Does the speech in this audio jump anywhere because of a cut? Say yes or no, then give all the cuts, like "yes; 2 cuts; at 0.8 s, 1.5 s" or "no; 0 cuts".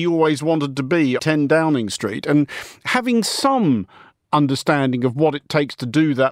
yes; 1 cut; at 1.2 s